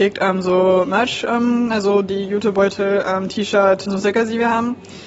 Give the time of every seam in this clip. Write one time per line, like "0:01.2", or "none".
0:01.7
0:03.8